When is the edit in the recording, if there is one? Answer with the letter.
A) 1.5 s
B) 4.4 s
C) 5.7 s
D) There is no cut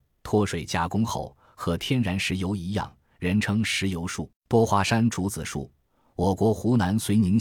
B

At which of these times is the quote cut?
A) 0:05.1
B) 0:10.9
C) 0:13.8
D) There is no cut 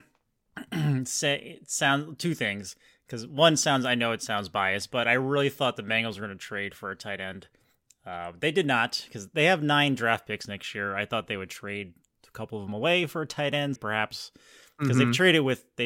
C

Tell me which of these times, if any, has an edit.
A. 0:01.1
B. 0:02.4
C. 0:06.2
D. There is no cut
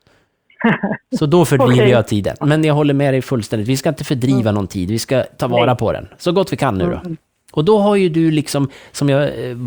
B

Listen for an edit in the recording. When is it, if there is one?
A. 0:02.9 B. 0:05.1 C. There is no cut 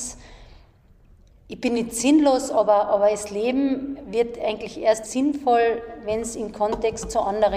B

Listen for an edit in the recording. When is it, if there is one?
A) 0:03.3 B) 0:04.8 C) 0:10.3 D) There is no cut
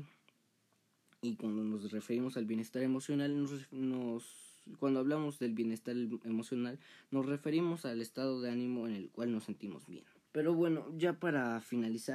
C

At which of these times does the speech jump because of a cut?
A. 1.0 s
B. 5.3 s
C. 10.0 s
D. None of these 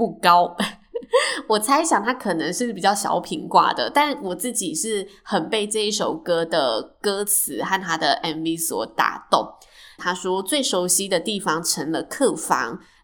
C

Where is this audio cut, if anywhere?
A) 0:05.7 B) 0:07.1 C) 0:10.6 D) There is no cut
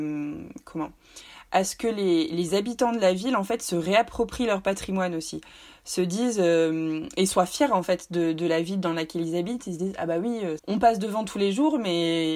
C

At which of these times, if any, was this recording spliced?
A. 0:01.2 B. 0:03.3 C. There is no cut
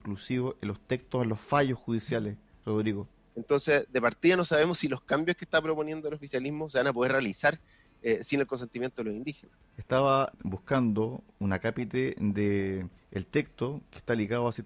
B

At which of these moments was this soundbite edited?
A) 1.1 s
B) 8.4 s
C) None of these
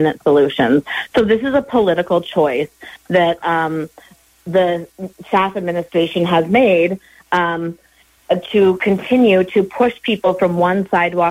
B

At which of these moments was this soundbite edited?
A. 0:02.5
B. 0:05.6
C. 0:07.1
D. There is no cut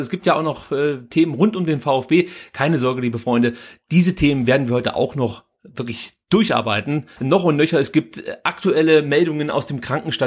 C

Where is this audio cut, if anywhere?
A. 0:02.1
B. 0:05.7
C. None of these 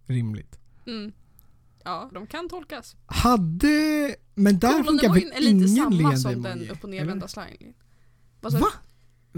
A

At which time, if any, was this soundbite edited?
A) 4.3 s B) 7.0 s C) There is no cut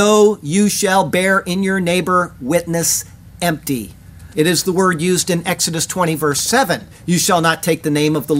A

